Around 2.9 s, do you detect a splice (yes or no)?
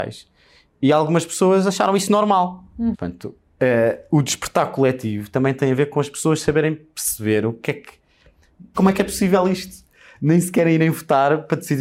yes